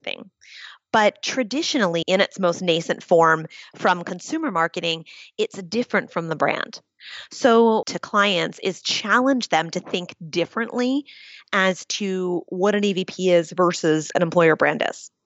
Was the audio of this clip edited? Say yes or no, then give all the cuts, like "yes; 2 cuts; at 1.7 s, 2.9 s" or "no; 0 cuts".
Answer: yes; 2 cuts; at 2.0 s, 7.8 s